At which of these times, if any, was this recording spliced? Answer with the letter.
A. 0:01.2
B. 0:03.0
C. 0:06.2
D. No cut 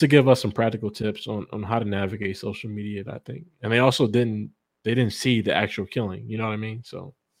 B